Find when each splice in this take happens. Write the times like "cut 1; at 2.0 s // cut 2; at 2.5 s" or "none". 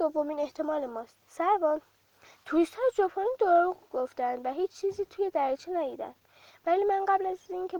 cut 1; at 1.2 s